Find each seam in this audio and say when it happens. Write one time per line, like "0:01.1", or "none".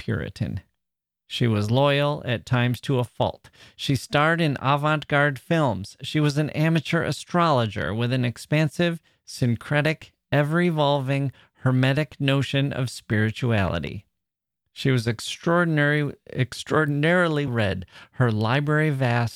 0:17.5